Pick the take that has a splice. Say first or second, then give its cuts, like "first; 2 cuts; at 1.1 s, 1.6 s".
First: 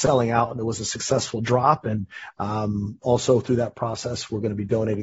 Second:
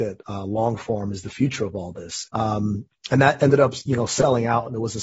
second; 1 cut; at 2.3 s